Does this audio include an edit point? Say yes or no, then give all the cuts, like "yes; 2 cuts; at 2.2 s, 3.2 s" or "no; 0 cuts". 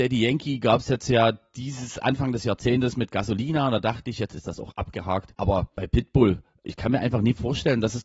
yes; 1 cut; at 6.6 s